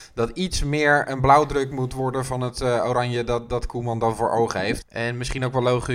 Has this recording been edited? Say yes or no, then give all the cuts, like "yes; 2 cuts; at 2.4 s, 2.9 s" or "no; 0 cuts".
yes; 1 cut; at 4.8 s